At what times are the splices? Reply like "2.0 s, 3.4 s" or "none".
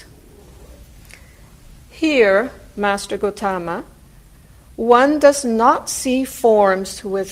1.8 s